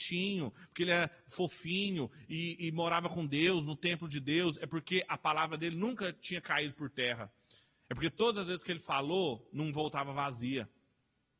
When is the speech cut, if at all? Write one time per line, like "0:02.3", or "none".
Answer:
none